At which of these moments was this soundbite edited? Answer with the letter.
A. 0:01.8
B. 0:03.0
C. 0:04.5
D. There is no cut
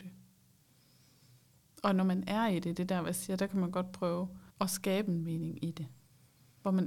C